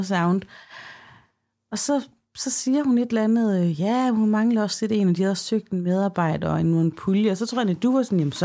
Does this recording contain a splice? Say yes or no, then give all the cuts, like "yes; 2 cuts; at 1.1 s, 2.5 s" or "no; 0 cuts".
no; 0 cuts